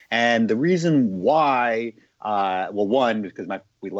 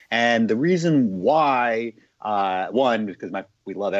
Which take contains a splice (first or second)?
second